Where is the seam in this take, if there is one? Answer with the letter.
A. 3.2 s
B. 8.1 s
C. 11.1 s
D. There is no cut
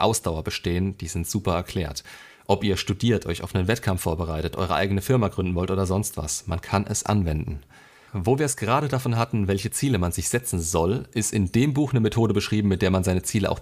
B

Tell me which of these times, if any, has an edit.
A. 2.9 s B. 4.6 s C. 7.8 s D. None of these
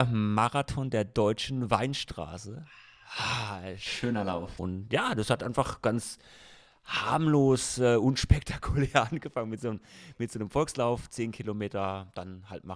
B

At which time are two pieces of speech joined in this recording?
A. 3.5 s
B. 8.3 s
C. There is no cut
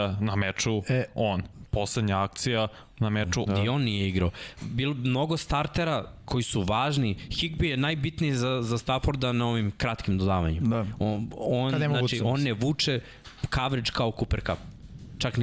A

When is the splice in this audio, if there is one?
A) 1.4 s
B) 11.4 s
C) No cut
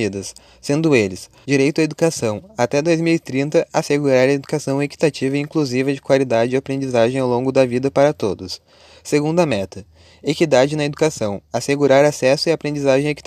A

